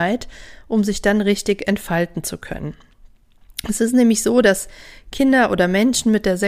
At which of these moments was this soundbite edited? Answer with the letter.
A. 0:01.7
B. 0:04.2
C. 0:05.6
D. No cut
D